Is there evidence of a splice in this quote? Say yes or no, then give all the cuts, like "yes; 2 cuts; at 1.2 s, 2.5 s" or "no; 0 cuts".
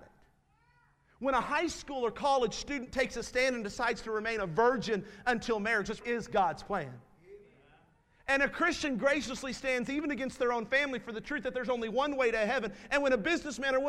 yes; 1 cut; at 6.0 s